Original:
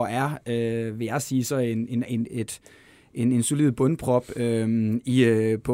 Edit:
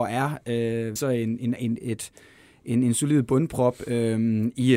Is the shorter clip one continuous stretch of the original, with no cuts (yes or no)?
no